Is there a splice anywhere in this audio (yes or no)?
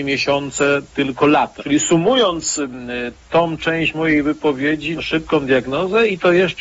yes